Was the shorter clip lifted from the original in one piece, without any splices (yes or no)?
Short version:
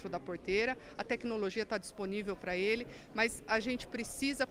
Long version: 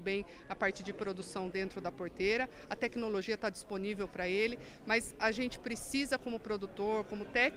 yes